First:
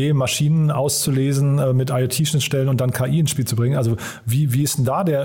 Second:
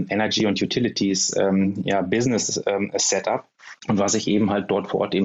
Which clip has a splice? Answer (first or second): second